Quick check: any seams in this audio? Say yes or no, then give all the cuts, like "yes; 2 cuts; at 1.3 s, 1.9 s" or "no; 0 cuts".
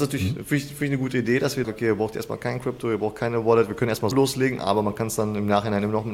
yes; 2 cuts; at 1.6 s, 4.1 s